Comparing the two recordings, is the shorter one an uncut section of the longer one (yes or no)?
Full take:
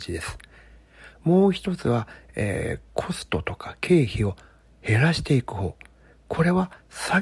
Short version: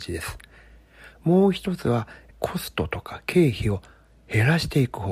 no